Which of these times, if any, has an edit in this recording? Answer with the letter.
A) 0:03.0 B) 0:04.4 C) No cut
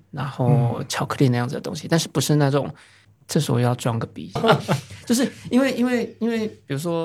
B